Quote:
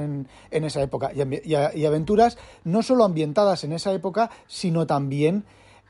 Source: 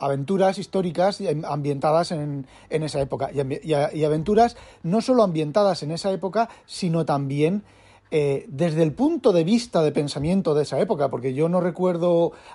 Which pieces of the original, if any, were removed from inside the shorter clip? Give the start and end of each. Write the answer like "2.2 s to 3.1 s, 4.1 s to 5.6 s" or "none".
none